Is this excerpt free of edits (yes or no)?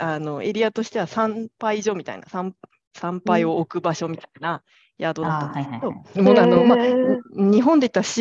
no